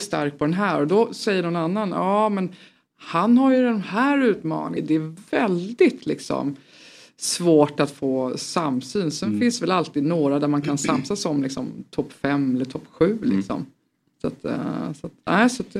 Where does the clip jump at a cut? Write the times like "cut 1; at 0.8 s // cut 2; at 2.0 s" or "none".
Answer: cut 1; at 4.8 s